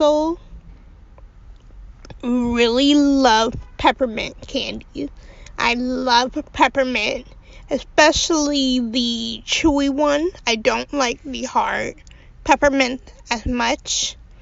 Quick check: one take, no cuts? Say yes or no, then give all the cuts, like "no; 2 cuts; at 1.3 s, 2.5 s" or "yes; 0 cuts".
yes; 0 cuts